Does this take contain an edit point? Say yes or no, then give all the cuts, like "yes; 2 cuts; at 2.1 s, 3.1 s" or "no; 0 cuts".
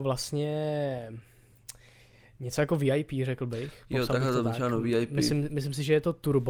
no; 0 cuts